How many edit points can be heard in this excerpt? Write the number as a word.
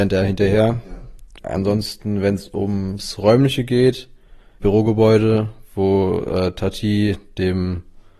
two